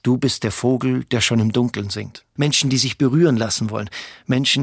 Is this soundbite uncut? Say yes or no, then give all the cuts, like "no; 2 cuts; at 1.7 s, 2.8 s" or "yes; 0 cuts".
no; 1 cut; at 2.4 s